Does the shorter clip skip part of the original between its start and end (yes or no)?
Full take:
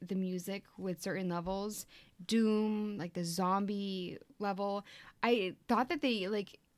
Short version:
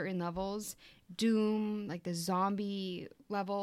no